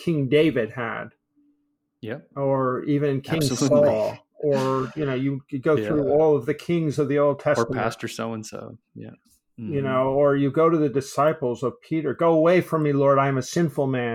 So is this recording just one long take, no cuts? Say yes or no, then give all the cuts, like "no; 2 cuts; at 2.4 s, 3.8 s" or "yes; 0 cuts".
yes; 0 cuts